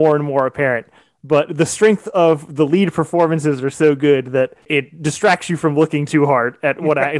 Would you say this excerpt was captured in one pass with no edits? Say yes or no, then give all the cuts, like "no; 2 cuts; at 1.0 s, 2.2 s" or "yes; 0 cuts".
yes; 0 cuts